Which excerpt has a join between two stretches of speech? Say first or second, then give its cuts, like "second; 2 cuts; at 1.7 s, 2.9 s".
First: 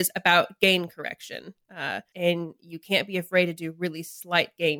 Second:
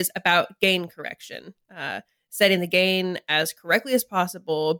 first; 1 cut; at 2.1 s